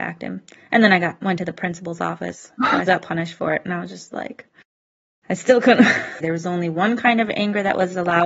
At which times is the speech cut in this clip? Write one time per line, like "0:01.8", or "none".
0:02.9
0:06.2